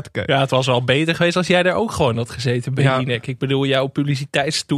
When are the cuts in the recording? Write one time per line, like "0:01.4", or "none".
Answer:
none

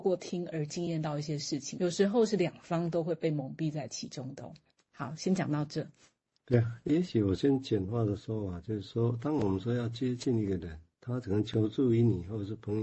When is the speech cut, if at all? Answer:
0:01.8

